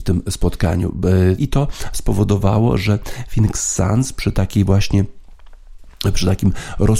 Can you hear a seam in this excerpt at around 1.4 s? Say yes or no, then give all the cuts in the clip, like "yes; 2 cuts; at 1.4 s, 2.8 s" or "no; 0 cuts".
yes; 1 cut; at 1.4 s